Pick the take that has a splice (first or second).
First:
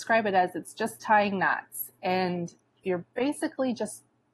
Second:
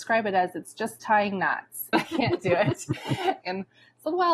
second